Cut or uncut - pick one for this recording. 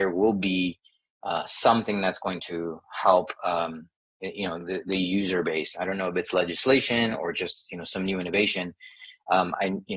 uncut